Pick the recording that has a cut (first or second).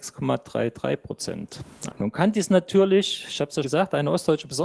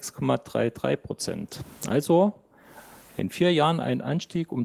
first